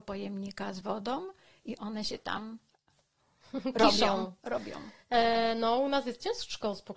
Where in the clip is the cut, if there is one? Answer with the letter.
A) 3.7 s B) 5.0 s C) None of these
C